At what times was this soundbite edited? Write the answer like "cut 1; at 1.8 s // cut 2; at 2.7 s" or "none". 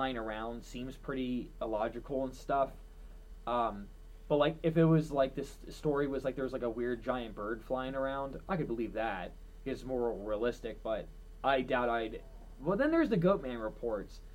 none